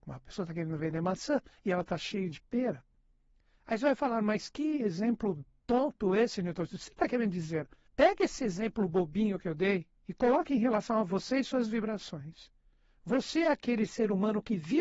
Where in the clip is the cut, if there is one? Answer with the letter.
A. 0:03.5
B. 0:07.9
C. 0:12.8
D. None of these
B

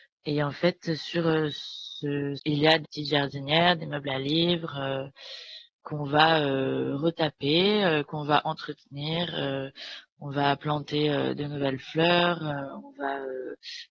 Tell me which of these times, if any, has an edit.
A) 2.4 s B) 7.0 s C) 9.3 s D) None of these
A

